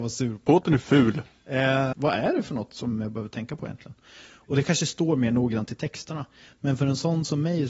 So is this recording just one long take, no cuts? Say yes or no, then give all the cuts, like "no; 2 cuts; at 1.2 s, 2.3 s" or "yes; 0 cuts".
no; 1 cut; at 1.9 s